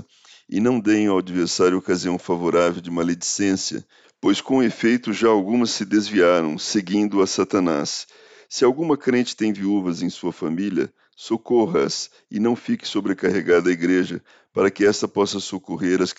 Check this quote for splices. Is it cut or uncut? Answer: uncut